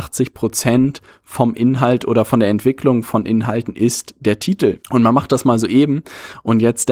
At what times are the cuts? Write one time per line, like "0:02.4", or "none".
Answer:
0:04.8